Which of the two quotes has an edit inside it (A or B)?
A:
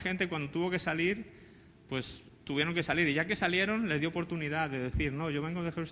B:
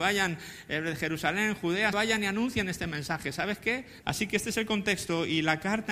B